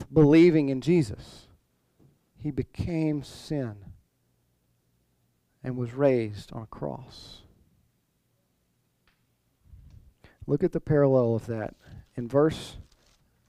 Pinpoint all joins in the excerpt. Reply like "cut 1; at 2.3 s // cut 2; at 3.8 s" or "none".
cut 1; at 2.3 s